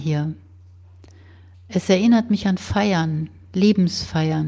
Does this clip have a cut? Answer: no; 0 cuts

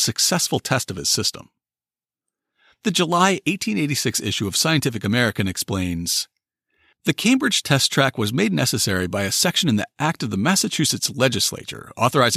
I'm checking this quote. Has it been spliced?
no; 0 cuts

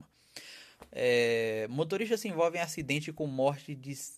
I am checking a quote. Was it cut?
no; 0 cuts

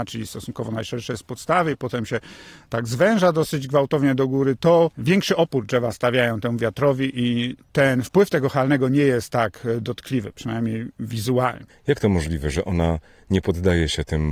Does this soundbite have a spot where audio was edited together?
yes; 1 cut; at 11.7 s

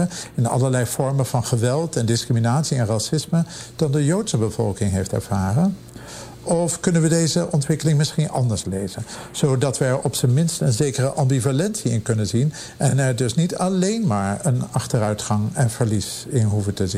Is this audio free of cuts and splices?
yes; 0 cuts

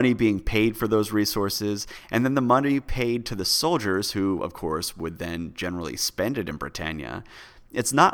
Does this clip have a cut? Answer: no; 0 cuts

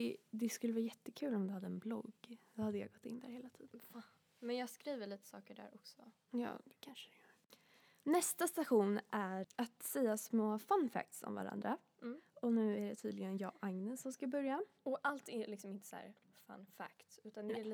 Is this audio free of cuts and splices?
no; 1 cut; at 9.4 s

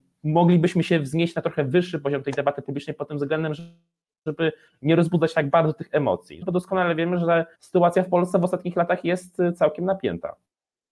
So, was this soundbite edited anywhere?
yes; 2 cuts; at 6.4 s, 7.5 s

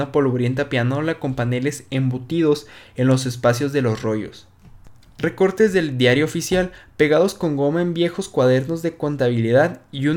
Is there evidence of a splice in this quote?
no; 0 cuts

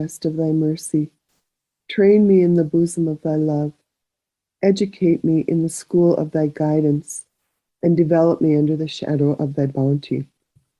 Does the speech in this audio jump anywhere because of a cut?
no; 0 cuts

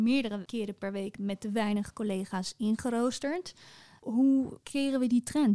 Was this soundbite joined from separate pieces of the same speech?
no; 0 cuts

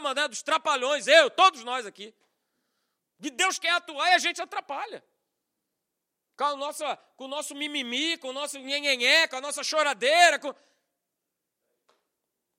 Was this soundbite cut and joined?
yes; 1 cut; at 3.2 s

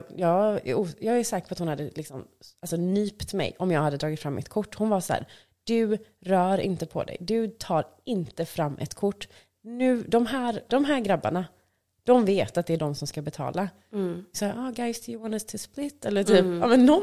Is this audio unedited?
no; 2 cuts; at 10.7 s, 14.3 s

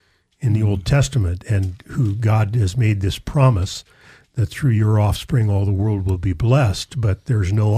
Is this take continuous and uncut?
yes; 0 cuts

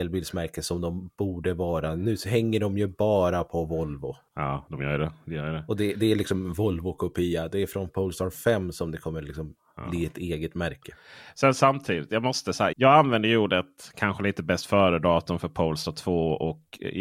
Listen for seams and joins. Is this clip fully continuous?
no; 1 cut; at 12.7 s

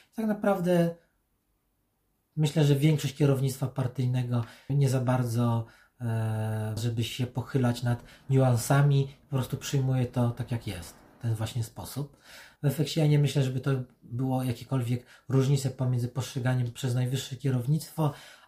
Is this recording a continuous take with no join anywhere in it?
no; 3 cuts; at 4.7 s, 6.8 s, 12.6 s

